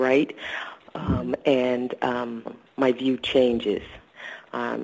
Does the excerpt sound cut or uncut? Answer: cut